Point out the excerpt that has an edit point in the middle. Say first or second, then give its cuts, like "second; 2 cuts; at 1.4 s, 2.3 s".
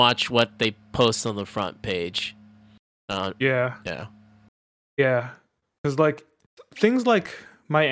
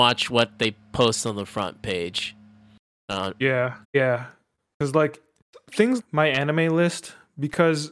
second; 2 cuts; at 3.8 s, 6.0 s